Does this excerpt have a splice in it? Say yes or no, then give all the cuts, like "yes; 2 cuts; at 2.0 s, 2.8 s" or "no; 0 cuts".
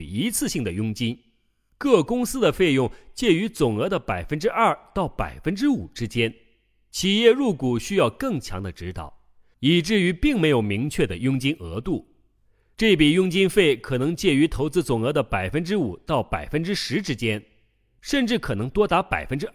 yes; 1 cut; at 9.5 s